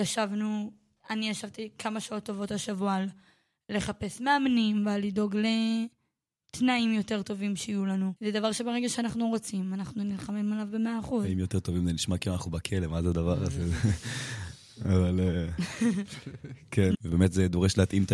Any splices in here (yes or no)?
yes